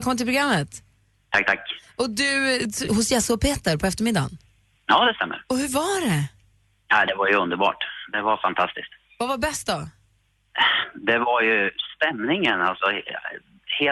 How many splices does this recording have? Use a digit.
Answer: 1